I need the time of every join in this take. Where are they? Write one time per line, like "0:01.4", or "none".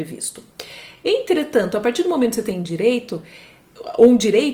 none

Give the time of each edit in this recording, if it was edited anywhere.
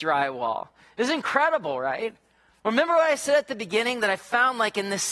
none

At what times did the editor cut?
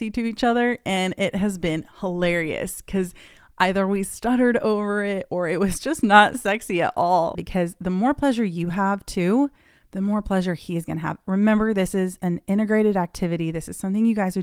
0:07.3

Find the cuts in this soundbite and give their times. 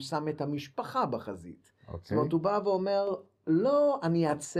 none

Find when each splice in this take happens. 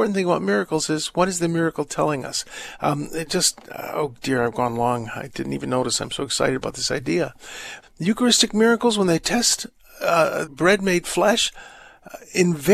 0:07.8
0:10.5

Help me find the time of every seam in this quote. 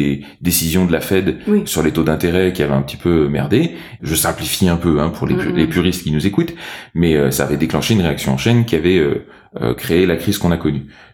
0:04.0

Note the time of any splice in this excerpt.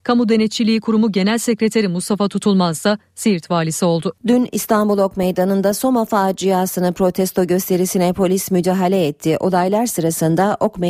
0:04.2

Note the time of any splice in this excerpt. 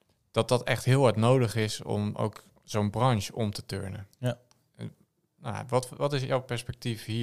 none

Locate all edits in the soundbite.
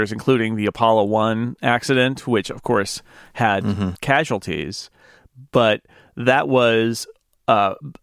none

